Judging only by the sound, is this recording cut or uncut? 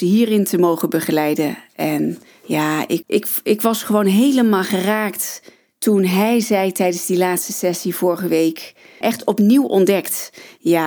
cut